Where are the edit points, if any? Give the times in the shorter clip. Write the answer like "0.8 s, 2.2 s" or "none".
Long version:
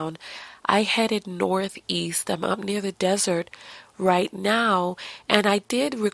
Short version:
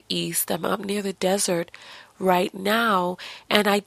none